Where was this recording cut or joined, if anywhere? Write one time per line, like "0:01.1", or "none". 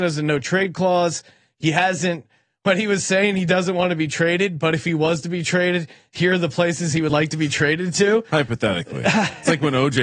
none